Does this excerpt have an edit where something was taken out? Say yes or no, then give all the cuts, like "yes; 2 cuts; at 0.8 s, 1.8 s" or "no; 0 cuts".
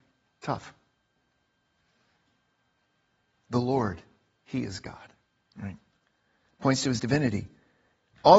yes; 1 cut; at 5.5 s